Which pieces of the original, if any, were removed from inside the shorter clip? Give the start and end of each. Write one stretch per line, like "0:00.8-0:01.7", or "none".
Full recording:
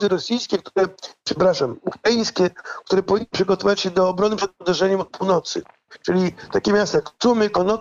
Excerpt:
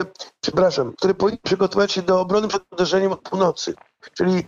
0:01.8-0:02.8

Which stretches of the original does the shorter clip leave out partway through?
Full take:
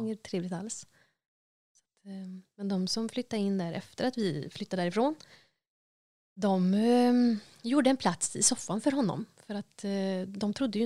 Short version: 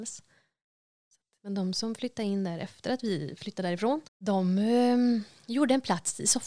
0:02.0-0:02.5
0:05.2-0:06.2

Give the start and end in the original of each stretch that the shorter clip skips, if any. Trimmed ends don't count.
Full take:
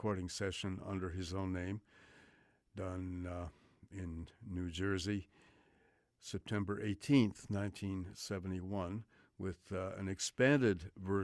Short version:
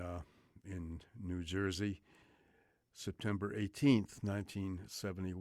none

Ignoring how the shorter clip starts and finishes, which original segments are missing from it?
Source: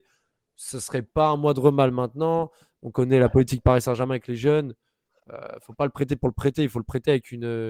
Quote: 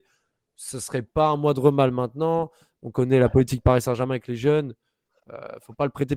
none

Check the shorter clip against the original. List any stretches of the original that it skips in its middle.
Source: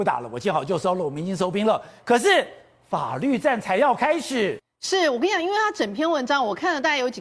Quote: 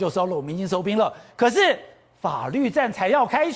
none

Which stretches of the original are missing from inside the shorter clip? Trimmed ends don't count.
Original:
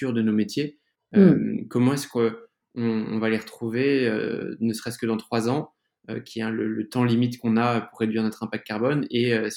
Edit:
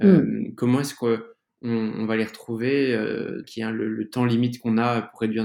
0:04.6-0:06.2

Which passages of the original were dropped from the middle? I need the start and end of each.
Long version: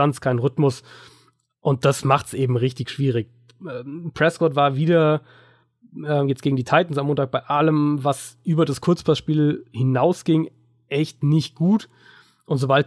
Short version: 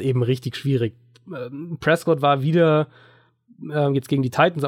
none

